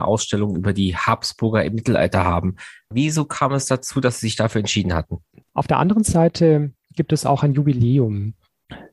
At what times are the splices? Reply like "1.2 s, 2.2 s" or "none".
2.9 s, 5.4 s